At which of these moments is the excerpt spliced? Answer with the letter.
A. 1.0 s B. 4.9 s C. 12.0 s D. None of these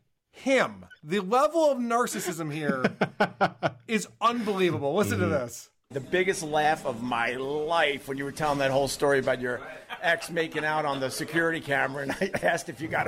D